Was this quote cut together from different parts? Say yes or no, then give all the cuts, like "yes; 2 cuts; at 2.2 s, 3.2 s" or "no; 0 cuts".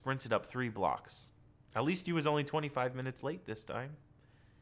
no; 0 cuts